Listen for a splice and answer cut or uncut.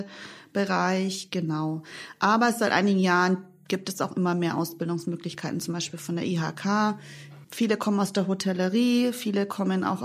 cut